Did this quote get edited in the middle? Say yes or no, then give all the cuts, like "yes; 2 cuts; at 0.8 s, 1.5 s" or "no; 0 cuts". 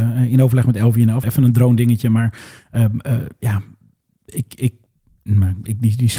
yes; 1 cut; at 1.2 s